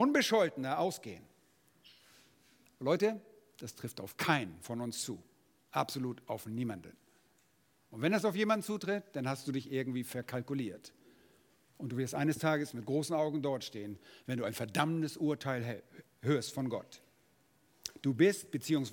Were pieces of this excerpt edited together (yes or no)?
no